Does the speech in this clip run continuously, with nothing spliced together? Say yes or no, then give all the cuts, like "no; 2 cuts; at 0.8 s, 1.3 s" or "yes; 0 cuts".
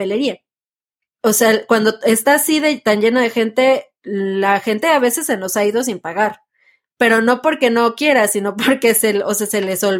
no; 1 cut; at 1.1 s